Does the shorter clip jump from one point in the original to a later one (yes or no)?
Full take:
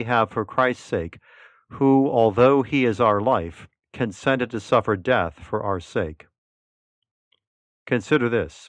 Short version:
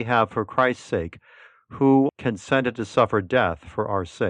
yes